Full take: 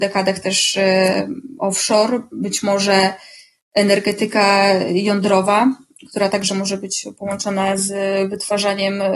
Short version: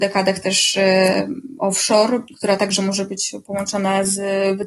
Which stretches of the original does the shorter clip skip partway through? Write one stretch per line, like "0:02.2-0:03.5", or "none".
0:02.3-0:06.0